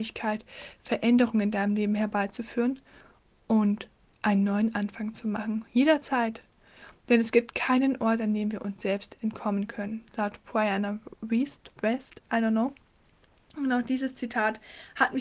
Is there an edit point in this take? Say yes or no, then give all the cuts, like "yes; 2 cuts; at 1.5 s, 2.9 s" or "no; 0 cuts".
no; 0 cuts